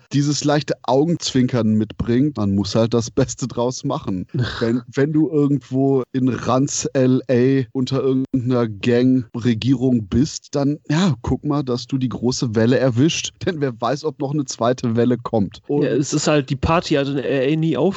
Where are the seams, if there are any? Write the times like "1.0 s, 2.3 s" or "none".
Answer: 2.3 s